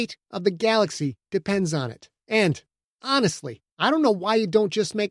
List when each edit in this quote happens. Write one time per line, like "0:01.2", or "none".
0:02.2
0:03.7